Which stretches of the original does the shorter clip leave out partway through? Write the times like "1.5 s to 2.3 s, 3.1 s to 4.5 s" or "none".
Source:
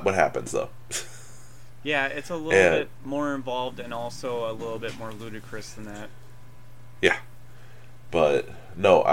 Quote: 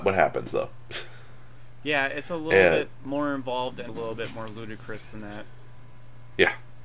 3.9 s to 4.5 s